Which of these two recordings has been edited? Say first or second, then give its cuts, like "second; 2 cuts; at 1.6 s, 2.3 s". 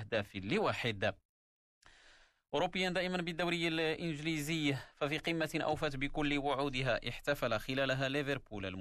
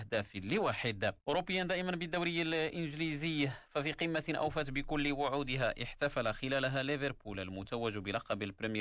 second; 1 cut; at 1.2 s